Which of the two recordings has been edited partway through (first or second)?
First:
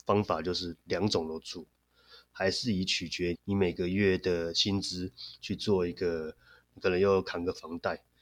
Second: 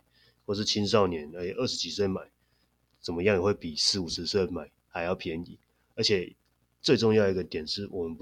first